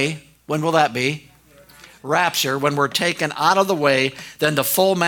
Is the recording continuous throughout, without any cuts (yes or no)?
yes